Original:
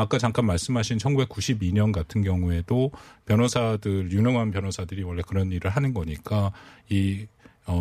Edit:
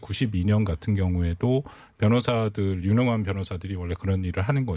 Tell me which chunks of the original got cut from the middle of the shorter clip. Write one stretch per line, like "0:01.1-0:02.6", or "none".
none